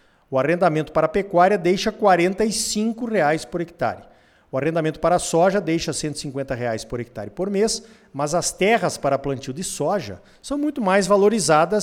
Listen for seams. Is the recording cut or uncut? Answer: uncut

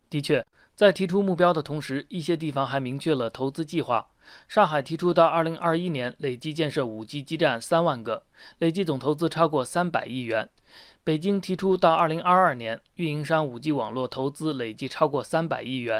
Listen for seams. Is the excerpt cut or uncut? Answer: uncut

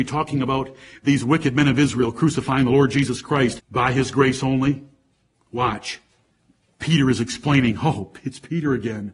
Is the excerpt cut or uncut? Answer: cut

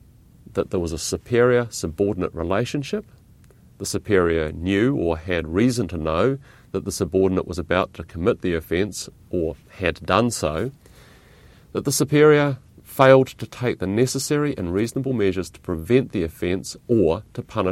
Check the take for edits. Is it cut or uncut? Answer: cut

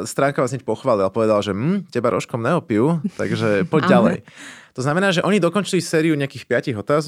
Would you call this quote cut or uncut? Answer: uncut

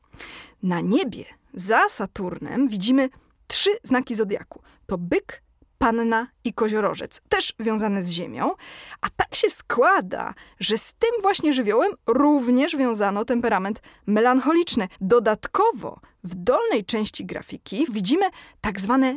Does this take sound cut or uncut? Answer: cut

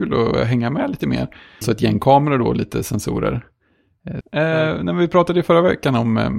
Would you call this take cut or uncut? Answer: cut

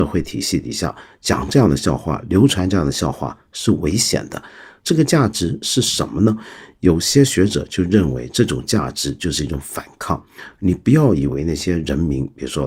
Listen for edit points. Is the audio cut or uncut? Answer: cut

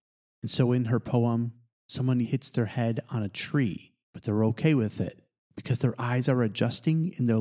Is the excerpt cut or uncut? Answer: cut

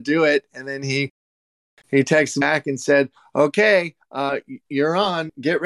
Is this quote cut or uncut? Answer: uncut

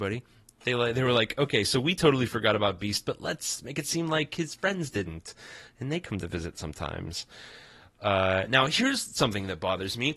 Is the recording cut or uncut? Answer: uncut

